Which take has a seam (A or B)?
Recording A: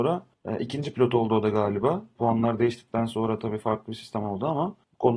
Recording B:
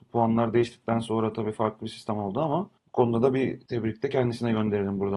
A